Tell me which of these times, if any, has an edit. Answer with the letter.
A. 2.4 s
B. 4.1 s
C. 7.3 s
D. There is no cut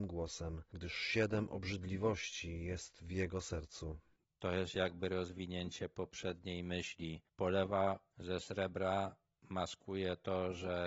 C